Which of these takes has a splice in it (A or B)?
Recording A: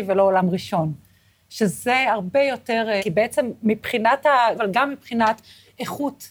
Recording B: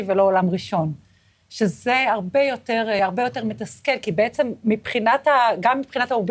A